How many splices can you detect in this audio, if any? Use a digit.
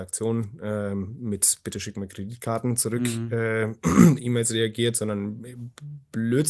0